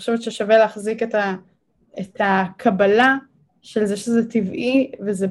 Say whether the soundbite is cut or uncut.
uncut